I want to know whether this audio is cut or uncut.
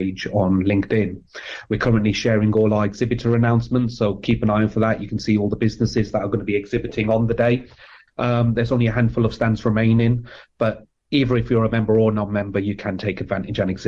cut